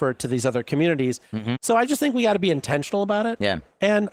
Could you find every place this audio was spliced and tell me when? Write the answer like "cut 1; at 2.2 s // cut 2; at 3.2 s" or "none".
cut 1; at 1.6 s